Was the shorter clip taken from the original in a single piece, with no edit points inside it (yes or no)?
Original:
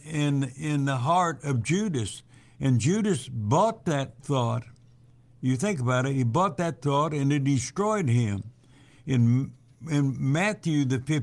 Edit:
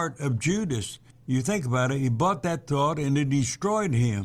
no